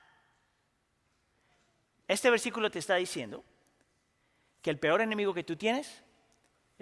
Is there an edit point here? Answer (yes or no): no